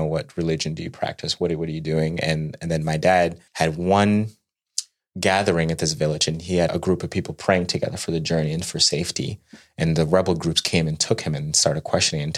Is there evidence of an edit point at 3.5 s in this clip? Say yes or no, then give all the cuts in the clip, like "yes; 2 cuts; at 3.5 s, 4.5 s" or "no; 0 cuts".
yes; 2 cuts; at 3.5 s, 6.7 s